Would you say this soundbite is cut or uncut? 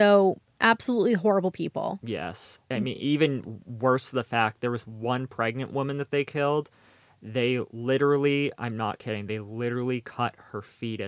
uncut